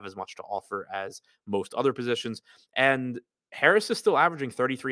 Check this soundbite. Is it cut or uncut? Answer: uncut